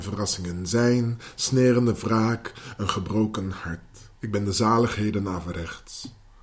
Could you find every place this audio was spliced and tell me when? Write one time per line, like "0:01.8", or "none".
0:04.2

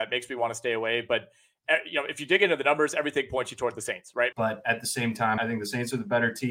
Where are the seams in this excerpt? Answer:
0:04.3
0:05.4

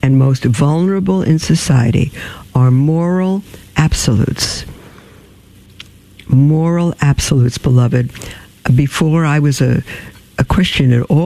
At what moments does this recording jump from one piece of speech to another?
none

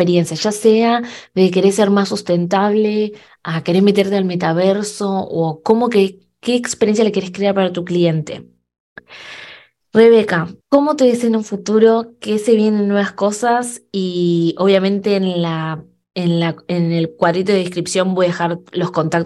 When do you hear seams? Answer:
0:10.6

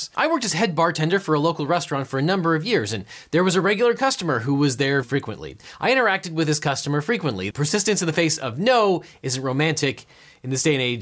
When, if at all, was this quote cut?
0:05.0
0:07.5

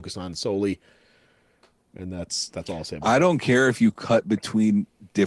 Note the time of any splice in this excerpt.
none

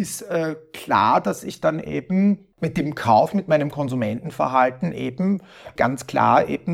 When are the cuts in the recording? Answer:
0:02.5
0:05.8

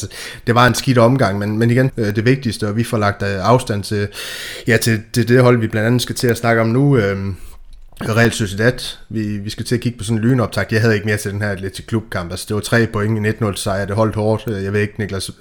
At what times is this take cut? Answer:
0:01.9

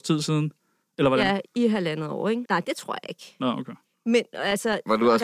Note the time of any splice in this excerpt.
0:02.4

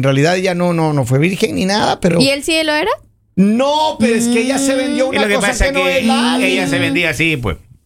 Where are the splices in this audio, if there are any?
none

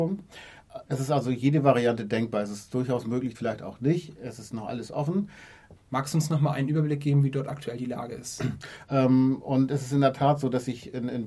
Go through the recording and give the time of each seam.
0:03.3
0:05.8
0:08.9

